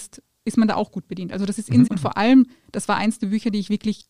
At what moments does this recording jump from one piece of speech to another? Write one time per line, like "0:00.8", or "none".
0:01.9